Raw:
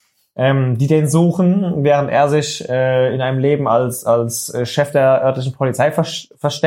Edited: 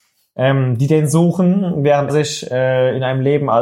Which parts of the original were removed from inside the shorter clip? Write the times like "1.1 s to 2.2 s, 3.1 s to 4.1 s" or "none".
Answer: 2.1 s to 2.3 s